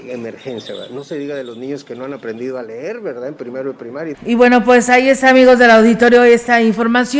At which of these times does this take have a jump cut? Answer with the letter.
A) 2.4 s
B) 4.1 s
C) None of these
B